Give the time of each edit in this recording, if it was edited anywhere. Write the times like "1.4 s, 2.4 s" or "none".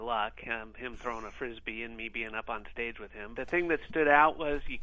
3.4 s